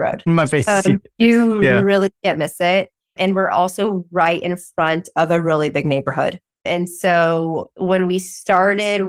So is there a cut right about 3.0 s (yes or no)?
no